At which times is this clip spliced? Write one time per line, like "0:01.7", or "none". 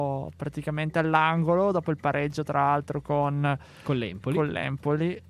none